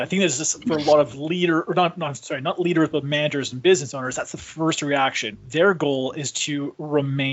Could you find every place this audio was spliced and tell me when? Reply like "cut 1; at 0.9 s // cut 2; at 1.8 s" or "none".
cut 1; at 5.3 s